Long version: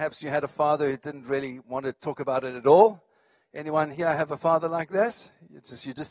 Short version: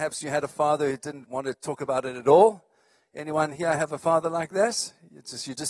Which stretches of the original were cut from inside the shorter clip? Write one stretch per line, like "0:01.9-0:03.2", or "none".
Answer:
0:01.2-0:01.6